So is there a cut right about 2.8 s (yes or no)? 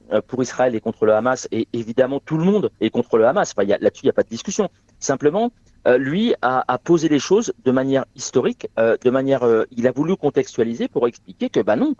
yes